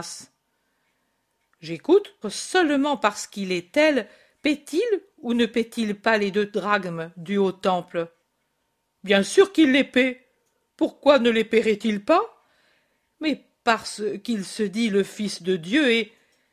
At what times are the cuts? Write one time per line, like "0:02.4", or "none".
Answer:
0:02.2